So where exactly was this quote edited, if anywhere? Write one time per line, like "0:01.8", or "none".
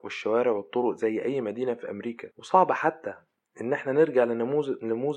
0:02.3